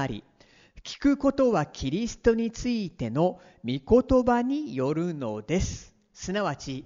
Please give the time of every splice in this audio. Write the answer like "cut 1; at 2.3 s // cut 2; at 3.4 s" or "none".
none